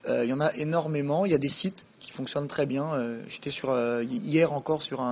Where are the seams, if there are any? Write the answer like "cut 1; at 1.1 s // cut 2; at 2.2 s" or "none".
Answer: none